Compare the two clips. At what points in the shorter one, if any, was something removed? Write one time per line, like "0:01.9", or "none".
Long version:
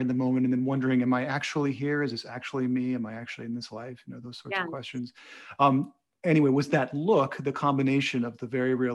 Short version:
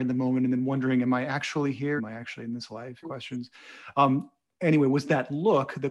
0:02.0
0:03.0